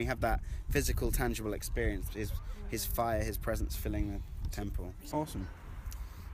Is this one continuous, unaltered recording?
no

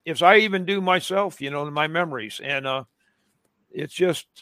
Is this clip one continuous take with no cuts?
yes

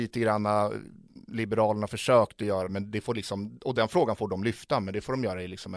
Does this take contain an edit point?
yes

